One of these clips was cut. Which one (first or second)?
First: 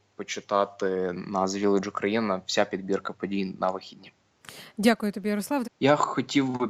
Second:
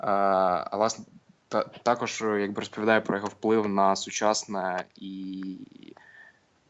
first